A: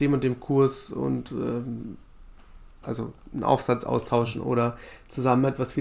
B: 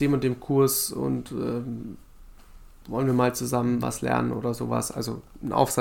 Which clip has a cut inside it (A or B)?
A